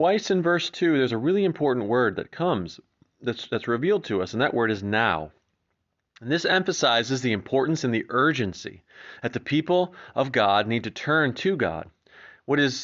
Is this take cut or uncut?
uncut